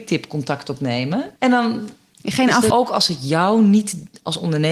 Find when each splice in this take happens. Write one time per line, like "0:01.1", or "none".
0:01.4
0:02.7